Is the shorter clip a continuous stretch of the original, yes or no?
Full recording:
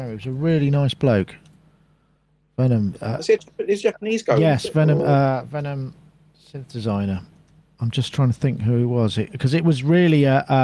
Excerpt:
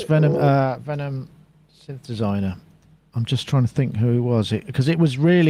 yes